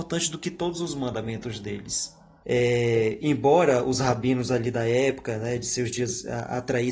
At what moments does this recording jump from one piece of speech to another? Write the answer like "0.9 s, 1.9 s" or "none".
2.4 s

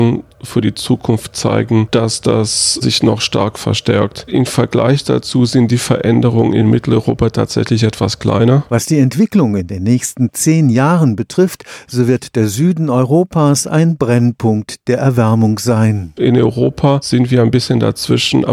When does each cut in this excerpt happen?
8.7 s, 16.2 s

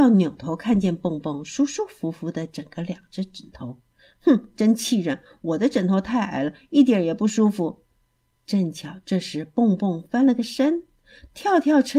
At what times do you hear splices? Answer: none

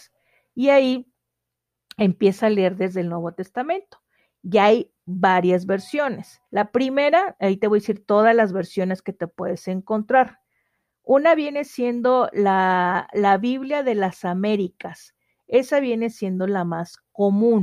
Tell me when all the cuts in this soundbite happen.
6.5 s

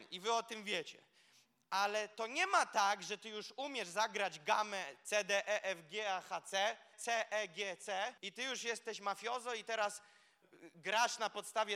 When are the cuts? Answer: 6.9 s, 8.2 s

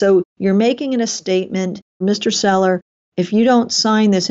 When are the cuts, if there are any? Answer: 2.0 s

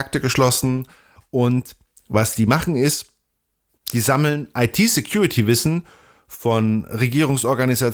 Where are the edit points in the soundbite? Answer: 1.2 s

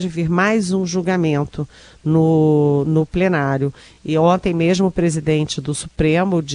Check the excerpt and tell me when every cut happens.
none

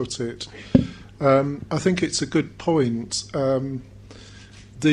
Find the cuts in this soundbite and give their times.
none

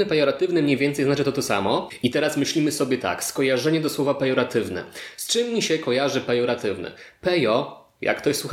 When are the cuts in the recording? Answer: none

